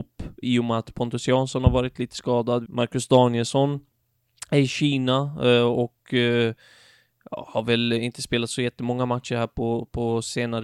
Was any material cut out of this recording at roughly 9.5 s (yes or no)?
no